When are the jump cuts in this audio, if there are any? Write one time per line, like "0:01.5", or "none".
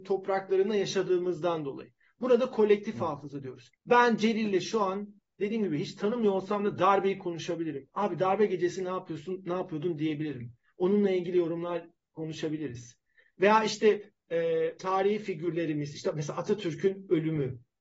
0:03.8
0:14.8